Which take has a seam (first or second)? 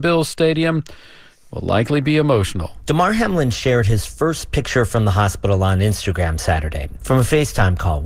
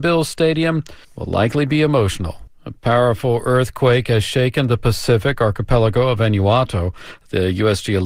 second